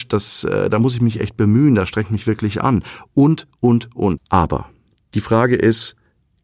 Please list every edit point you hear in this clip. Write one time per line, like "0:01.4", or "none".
0:04.2